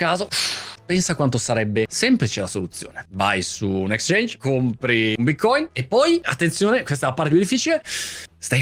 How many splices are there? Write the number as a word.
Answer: zero